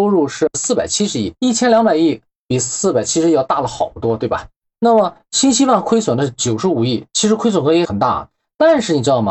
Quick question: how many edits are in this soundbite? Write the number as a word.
zero